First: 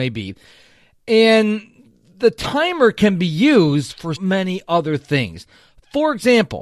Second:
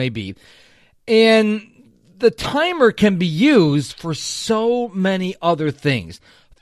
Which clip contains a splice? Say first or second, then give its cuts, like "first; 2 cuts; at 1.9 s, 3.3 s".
first; 1 cut; at 4.2 s